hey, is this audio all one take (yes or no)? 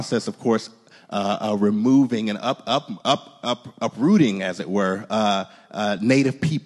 yes